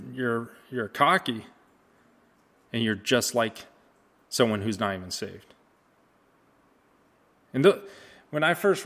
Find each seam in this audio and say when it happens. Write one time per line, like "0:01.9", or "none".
0:02.7